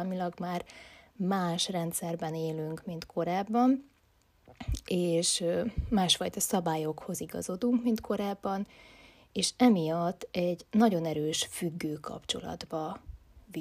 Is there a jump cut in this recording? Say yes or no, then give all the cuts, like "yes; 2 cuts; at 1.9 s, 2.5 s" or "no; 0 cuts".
no; 0 cuts